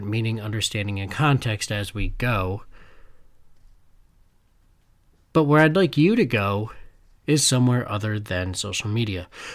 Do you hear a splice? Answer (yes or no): no